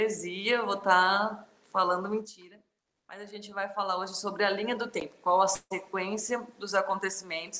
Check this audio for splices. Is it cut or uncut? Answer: uncut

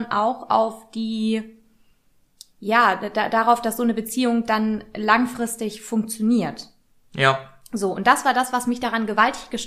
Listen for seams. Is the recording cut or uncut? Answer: uncut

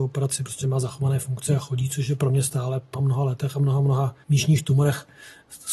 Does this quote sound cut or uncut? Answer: cut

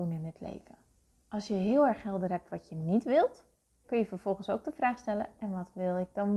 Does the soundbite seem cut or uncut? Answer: cut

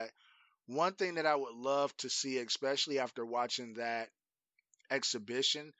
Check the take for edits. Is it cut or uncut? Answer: uncut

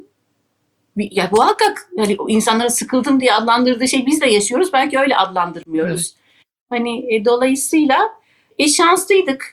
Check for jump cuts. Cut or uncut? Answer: uncut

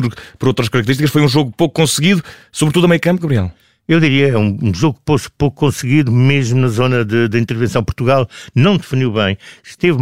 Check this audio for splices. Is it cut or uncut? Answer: uncut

